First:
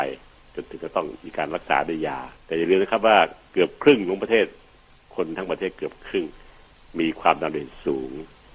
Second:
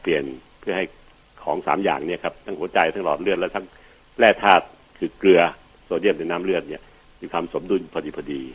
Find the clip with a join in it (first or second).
first